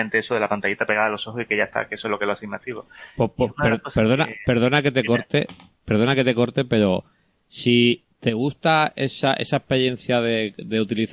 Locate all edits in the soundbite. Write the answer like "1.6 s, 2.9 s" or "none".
none